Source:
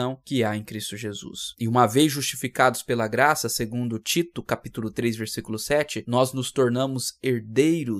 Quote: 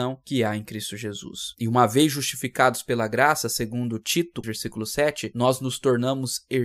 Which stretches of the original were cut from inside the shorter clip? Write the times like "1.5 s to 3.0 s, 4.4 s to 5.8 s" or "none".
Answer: 4.4 s to 5.2 s